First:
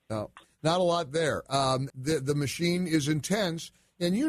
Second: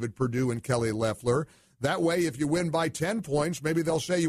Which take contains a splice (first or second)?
first